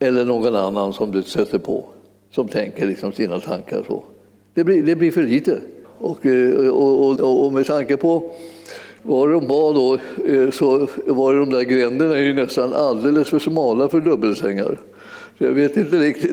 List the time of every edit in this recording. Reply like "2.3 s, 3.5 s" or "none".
5.8 s, 7.2 s